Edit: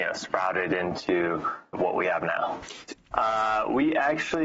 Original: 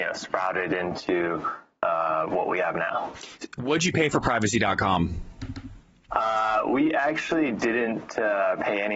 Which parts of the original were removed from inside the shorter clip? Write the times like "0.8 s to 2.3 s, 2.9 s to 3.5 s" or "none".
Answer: 1.7 s to 2.3 s, 3.5 s to 5.9 s

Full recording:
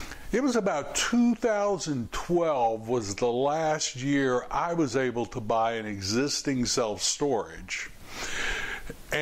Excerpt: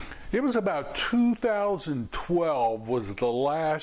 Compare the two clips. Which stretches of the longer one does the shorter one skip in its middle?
none

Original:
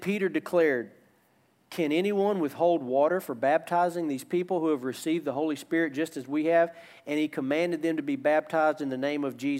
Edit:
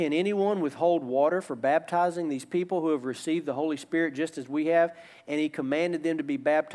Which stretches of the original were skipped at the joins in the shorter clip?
none

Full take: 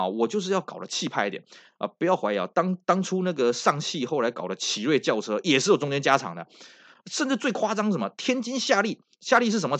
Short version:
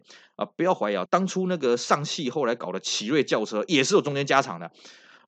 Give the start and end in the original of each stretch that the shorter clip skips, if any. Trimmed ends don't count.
2.5 s to 2.8 s

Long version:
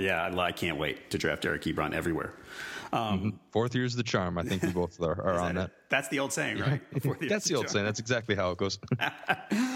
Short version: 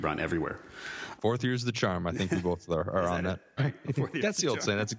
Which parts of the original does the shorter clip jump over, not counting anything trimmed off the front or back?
2.9 s to 3.5 s, 5.9 s to 6.6 s

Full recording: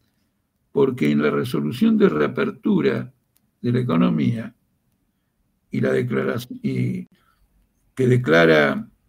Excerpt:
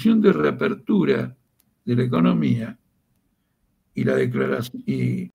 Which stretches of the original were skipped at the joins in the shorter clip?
none

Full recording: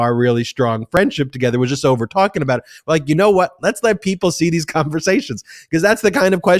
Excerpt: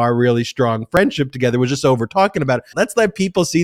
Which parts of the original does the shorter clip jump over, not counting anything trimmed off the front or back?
2.7 s to 3.6 s

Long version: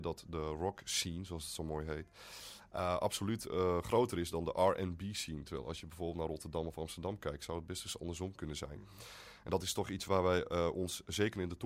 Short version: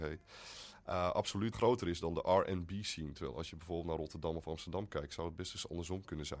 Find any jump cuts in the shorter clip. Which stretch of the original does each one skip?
3.4 s to 3.8 s

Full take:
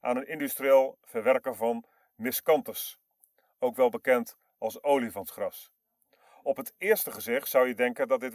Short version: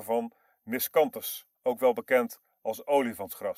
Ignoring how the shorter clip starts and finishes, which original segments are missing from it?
3.1 s to 3.5 s

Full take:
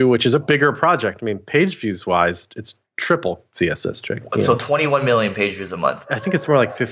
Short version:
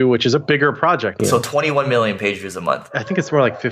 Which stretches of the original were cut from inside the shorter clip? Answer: 1.2 s to 4.4 s

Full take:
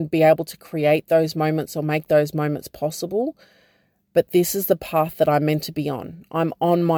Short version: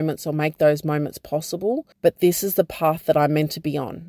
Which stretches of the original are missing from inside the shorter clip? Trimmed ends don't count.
3.4 s to 4.0 s

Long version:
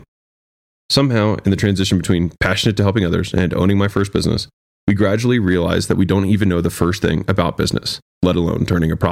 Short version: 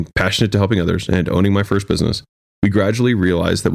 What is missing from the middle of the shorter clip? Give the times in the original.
none

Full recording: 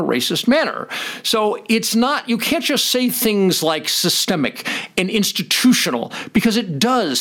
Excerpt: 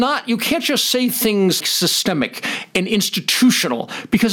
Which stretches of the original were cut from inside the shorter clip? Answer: 3.6 s to 3.8 s

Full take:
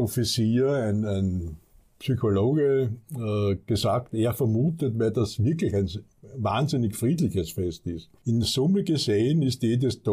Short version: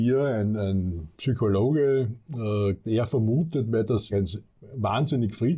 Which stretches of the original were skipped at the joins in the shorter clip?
1.6 s to 2.0 s, 3.6 s to 4.1 s, 5.4 s to 5.7 s

